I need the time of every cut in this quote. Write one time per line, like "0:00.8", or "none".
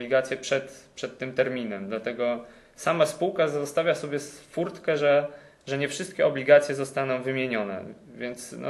none

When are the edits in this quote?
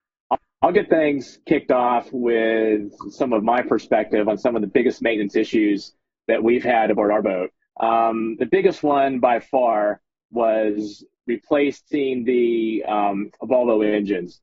none

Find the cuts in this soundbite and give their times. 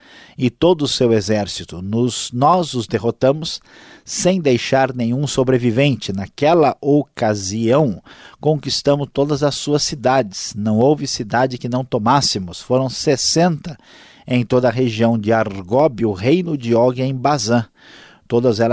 none

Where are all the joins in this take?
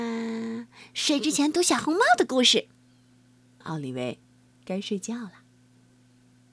0:03.6

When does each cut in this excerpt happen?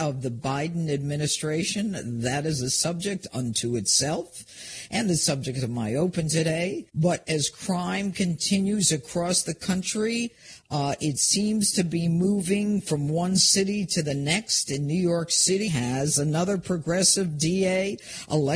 0:06.9
0:15.7

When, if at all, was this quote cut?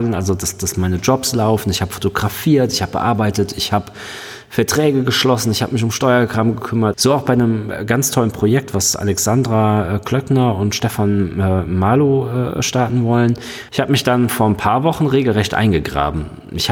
0:06.9
0:13.7

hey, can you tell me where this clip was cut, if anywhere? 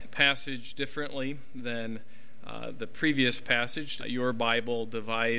0:04.0

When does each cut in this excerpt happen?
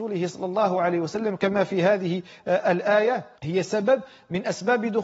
0:03.3

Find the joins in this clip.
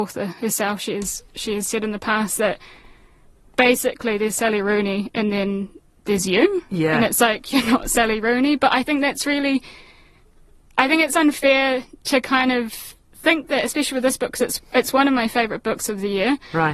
none

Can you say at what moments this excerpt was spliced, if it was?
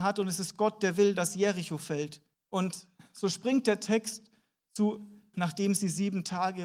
0:02.3
0:05.3

